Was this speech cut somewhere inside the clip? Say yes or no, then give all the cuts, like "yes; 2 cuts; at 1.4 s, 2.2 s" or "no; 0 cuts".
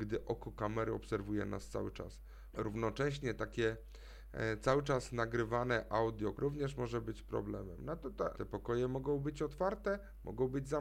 yes; 3 cuts; at 2.5 s, 6.3 s, 8.3 s